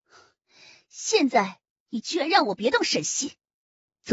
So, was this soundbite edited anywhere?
no; 0 cuts

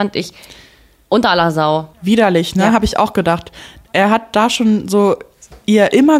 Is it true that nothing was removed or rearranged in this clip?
no; 1 cut; at 1.9 s

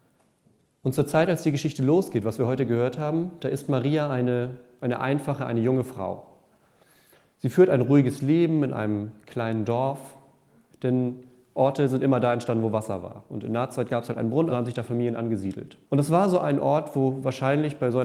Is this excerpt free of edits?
no; 3 cuts; at 10.7 s, 14.5 s, 15.8 s

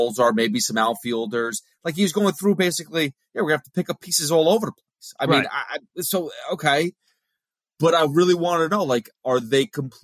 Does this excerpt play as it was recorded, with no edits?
yes; 0 cuts

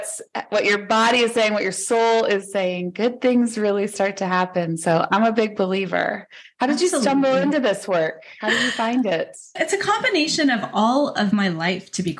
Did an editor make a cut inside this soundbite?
no; 0 cuts

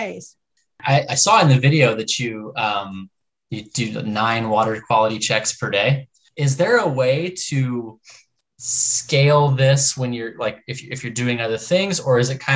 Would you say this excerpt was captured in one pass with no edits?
yes; 0 cuts

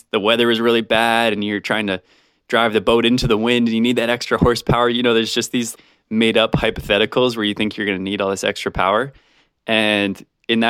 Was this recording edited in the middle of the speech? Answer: no; 0 cuts

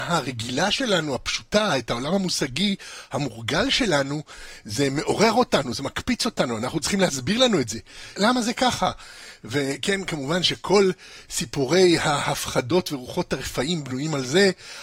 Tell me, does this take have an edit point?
yes; 1 cut; at 8.2 s

